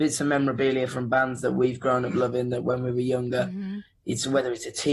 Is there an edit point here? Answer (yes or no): no